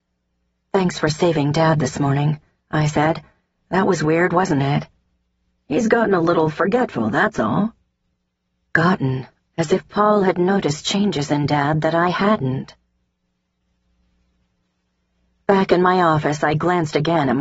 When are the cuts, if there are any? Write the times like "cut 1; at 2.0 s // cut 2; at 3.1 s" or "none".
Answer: cut 1; at 9.5 s